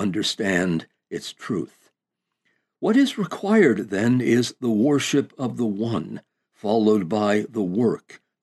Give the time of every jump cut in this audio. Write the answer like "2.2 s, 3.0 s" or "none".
none